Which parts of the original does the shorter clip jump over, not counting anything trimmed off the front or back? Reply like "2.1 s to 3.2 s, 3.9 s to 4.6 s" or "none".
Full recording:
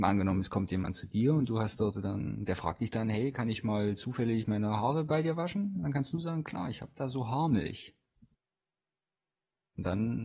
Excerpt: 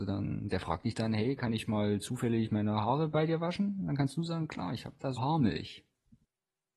7.1 s to 7.3 s